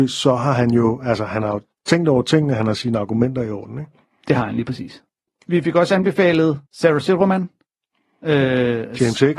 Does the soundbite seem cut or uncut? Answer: cut